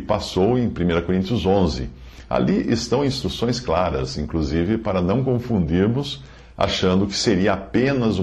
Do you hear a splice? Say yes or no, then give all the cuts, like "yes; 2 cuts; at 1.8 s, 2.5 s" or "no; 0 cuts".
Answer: no; 0 cuts